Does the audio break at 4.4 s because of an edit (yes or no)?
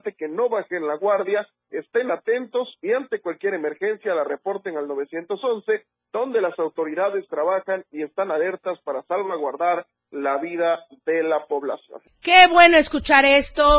no